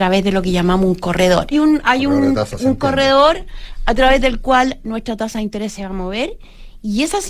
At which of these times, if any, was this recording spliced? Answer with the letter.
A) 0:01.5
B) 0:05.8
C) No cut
A